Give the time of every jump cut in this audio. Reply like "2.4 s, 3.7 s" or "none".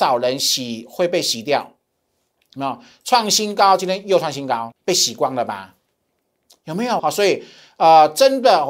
4.7 s, 7.0 s